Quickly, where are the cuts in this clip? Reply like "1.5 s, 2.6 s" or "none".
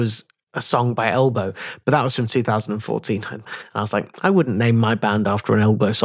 3.4 s